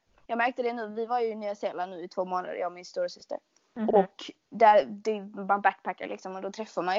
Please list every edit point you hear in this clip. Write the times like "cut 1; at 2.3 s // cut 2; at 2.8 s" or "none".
cut 1; at 4.5 s